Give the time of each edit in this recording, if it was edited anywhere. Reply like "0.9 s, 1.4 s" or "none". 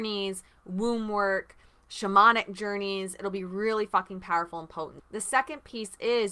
5.0 s